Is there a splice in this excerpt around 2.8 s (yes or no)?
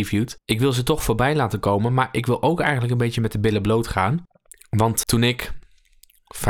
no